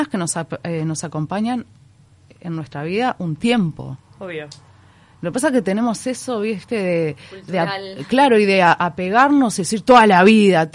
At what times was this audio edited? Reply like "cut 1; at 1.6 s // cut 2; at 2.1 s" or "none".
none